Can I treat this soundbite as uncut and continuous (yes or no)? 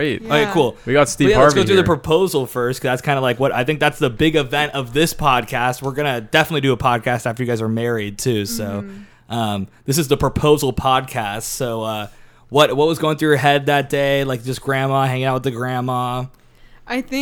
yes